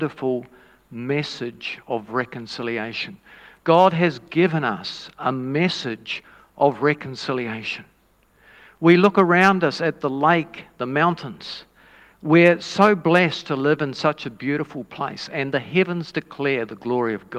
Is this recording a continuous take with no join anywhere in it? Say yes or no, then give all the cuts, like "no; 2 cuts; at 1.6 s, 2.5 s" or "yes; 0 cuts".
yes; 0 cuts